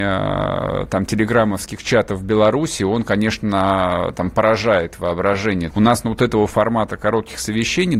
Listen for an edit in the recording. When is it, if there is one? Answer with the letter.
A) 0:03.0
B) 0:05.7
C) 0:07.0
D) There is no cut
B